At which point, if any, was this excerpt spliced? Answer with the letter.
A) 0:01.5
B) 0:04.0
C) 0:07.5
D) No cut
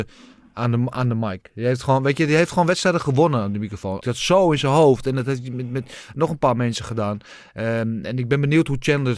B